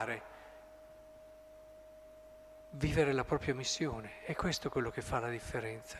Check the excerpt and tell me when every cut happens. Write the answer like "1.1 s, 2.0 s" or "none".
none